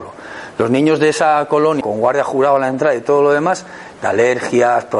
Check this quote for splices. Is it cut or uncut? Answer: cut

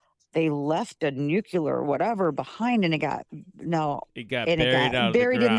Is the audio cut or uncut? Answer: uncut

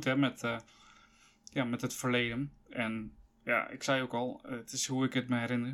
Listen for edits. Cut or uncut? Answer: uncut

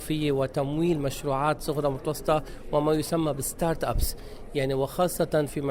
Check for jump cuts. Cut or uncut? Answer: uncut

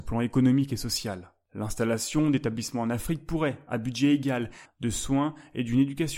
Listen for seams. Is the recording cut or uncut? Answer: cut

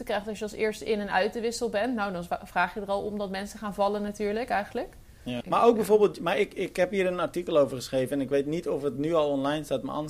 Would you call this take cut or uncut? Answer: cut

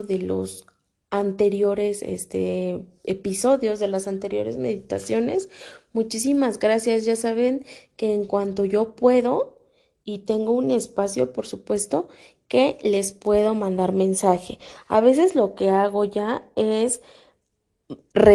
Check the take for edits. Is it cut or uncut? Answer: uncut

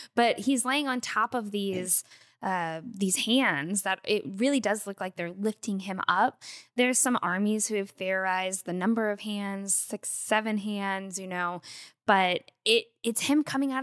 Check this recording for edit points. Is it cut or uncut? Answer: uncut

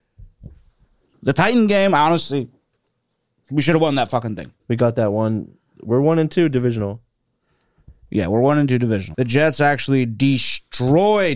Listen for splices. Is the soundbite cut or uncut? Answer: cut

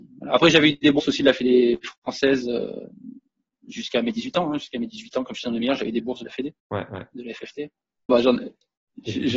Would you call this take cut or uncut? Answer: cut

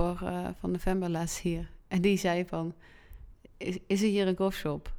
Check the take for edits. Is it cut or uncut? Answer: uncut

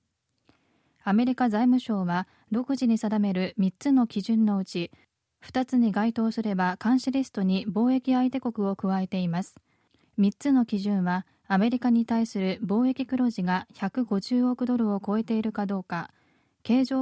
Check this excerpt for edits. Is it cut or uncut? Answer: uncut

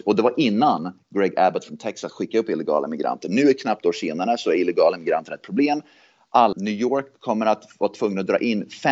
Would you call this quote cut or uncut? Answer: cut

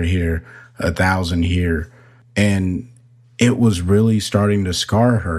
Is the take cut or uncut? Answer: uncut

